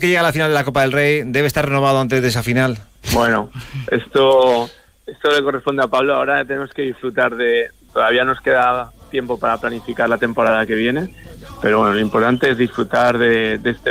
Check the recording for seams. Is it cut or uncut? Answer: cut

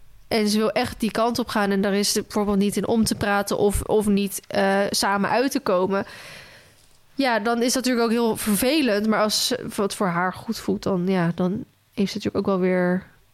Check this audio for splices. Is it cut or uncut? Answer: uncut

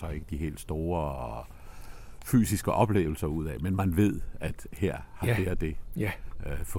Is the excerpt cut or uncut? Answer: uncut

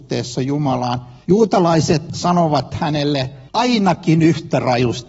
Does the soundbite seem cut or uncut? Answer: cut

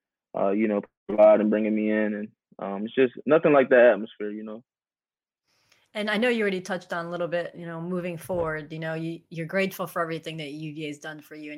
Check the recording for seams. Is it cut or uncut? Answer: uncut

